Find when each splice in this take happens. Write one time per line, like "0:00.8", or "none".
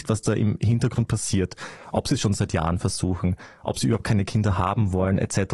none